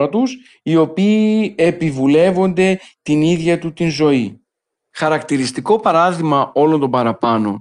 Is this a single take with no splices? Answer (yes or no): no